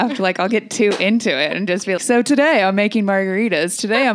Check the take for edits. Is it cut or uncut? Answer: cut